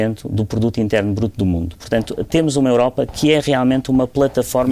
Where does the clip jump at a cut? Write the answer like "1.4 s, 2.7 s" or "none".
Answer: none